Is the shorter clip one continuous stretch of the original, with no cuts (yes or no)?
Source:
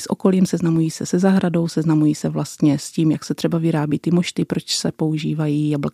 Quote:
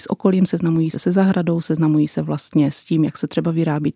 no